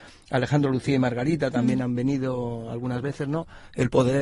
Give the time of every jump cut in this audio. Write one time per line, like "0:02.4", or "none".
none